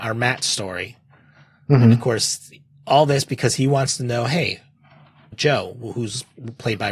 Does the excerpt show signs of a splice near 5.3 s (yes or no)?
yes